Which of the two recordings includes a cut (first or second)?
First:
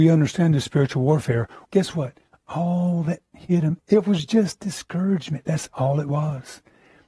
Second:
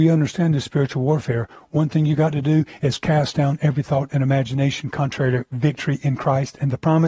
first